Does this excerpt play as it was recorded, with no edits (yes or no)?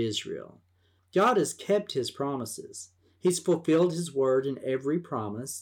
no